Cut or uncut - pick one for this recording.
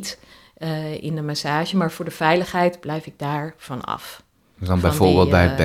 uncut